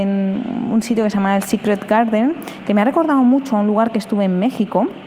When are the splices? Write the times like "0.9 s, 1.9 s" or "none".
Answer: none